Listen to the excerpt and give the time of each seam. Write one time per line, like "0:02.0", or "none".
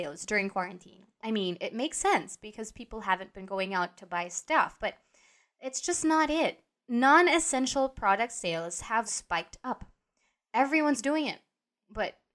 0:09.1